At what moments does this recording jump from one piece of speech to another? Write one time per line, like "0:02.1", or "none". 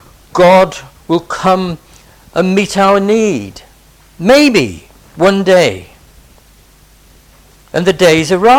none